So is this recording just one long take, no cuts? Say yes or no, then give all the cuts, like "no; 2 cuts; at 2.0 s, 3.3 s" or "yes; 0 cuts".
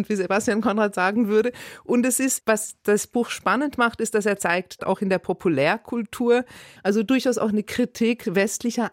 no; 3 cuts; at 2.4 s, 4.8 s, 6.8 s